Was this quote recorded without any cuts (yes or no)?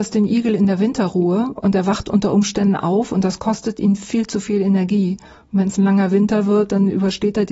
yes